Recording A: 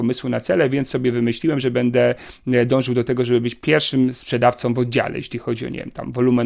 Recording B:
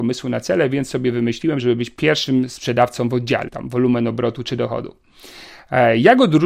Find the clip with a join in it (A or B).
B